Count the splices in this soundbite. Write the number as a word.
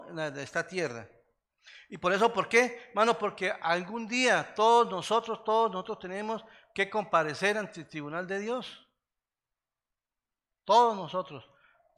zero